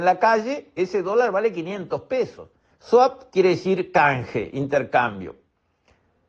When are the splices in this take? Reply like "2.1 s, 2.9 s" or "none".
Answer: 2.7 s